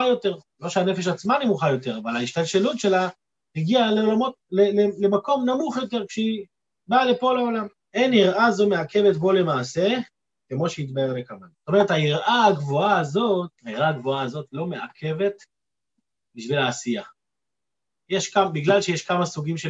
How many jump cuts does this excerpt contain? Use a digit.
3